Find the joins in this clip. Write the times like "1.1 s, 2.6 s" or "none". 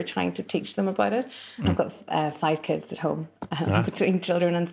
1.6 s